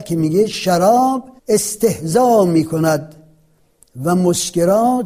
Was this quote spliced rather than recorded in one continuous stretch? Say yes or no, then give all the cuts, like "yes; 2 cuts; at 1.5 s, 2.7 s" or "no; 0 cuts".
yes; 1 cut; at 1.4 s